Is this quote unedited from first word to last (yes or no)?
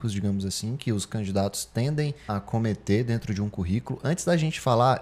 no